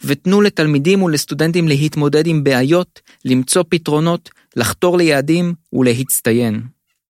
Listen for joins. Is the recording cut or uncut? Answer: uncut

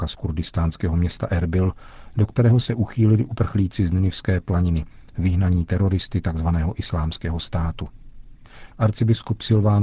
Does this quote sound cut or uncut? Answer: cut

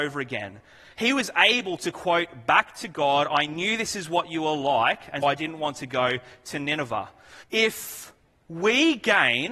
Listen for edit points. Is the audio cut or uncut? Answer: cut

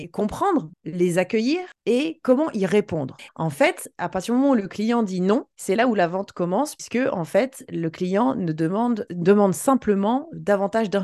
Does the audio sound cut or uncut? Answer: cut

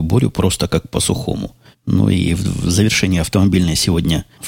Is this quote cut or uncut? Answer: cut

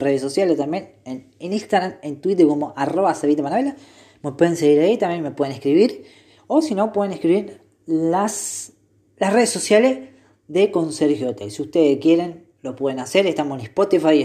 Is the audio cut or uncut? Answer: uncut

